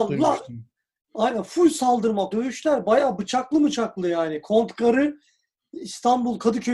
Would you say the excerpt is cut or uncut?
cut